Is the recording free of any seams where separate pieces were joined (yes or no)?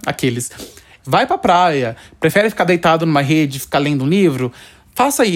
no